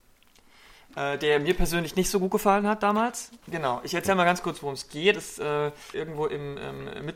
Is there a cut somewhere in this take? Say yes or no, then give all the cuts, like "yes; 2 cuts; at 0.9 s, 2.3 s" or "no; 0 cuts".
yes; 2 cuts; at 3.4 s, 5.9 s